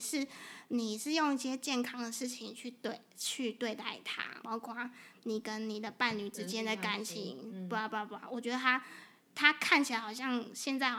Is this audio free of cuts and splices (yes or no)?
no